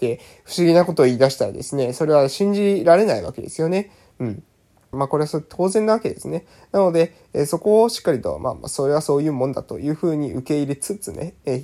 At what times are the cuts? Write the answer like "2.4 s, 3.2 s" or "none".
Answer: 4.9 s

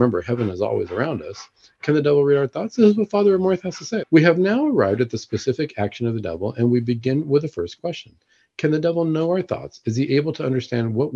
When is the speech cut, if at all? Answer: 4.0 s

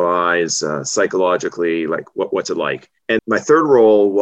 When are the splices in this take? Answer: 3.2 s

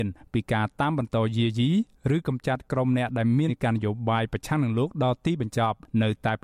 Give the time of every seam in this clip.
3.5 s

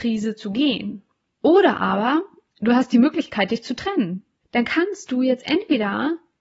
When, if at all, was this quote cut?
1.3 s, 4.4 s

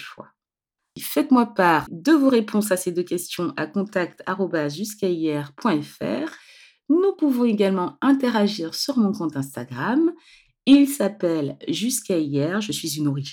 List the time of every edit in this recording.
1.9 s

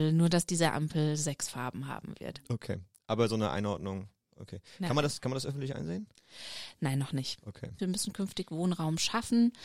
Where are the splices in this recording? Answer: 7.8 s

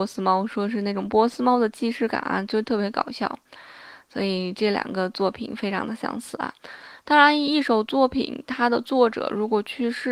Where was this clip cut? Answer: none

